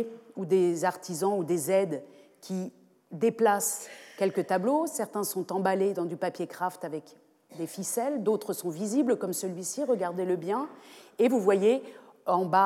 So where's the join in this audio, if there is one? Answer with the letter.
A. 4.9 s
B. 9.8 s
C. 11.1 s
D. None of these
D